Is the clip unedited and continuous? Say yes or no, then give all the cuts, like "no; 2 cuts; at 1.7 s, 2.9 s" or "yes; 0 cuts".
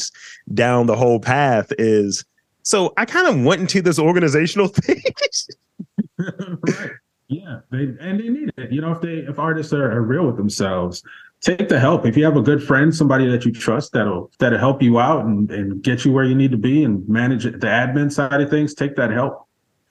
no; 1 cut; at 14.3 s